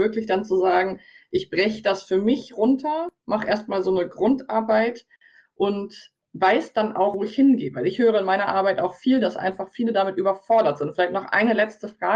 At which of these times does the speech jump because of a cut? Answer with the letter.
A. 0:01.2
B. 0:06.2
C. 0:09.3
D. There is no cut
B